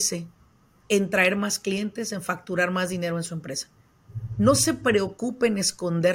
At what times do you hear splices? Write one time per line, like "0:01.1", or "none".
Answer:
none